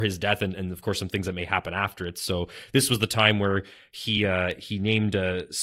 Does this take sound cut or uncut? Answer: uncut